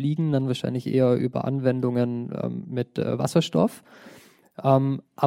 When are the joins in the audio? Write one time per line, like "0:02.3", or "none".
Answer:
none